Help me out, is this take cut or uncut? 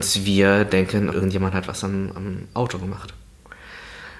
cut